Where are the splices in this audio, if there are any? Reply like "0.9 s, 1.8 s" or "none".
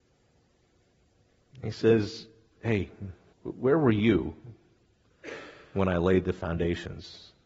3.3 s